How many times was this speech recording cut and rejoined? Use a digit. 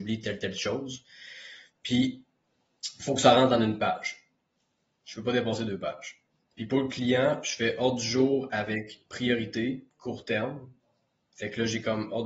0